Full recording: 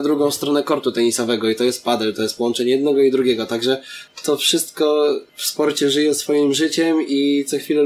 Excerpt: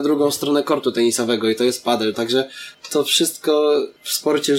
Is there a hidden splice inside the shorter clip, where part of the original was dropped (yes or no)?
yes